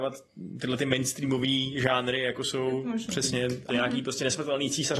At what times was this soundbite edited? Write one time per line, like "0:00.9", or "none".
0:03.7